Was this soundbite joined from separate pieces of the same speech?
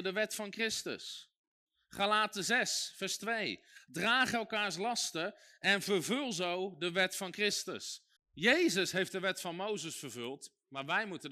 yes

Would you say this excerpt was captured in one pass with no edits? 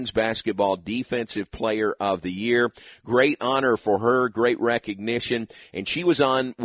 yes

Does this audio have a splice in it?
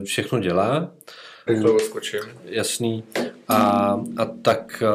yes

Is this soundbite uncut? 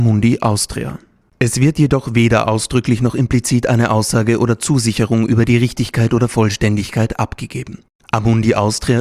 yes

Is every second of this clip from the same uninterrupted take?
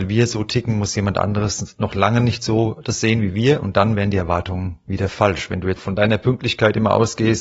no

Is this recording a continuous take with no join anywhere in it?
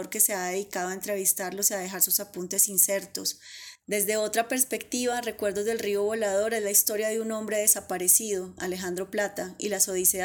no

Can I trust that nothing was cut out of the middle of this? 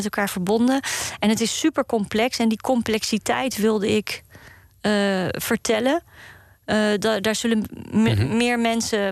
yes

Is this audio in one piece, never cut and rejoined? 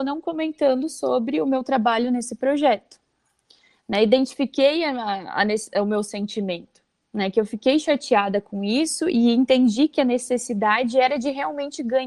yes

